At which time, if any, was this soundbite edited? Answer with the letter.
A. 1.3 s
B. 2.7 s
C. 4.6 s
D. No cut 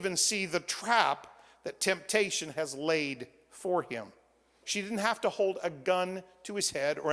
C